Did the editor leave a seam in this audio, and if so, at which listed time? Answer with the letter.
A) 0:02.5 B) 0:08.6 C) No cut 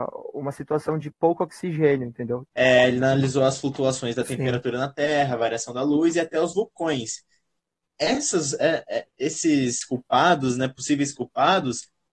A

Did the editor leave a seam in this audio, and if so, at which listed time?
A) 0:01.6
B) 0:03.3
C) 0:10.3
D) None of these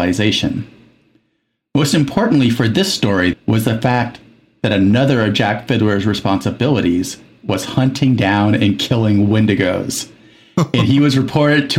B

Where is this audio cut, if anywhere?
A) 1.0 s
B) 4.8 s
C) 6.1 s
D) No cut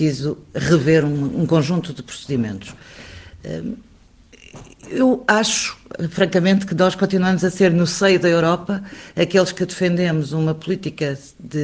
D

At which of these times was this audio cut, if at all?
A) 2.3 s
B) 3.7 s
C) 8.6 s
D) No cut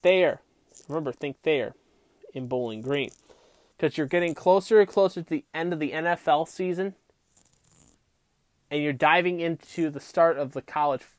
B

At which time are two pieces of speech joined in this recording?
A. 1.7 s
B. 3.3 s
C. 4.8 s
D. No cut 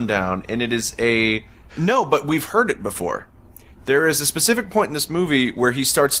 A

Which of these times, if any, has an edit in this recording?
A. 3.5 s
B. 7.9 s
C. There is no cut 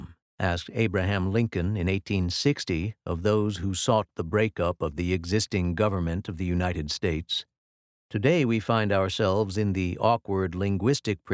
B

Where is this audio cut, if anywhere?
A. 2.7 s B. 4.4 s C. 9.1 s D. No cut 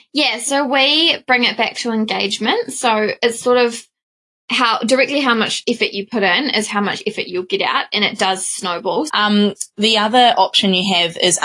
C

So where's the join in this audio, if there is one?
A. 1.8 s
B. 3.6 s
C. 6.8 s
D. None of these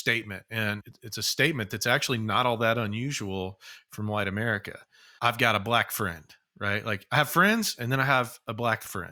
D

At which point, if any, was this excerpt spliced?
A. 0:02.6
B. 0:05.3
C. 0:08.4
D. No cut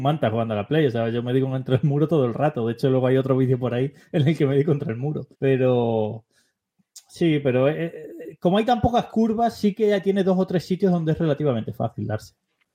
B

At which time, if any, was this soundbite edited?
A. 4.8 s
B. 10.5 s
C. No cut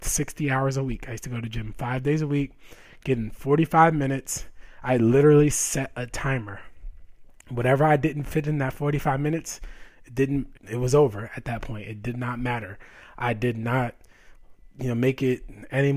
B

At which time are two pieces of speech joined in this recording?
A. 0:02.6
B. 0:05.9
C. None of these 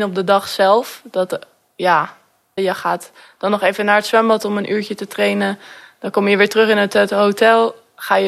A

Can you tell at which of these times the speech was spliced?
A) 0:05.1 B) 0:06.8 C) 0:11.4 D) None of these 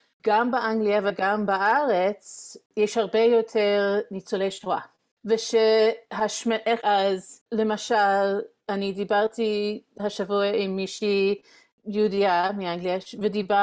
B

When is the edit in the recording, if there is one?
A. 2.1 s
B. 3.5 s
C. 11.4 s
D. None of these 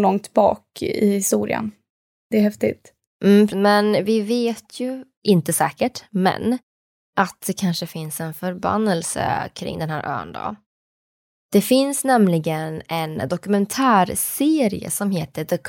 B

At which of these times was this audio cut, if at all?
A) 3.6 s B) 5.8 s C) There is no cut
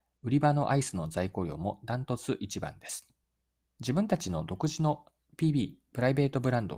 A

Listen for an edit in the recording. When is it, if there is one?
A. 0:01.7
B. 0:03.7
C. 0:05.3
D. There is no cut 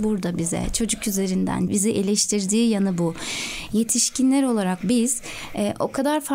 A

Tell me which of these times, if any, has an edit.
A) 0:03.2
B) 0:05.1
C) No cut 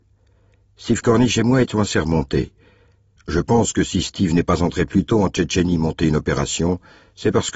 A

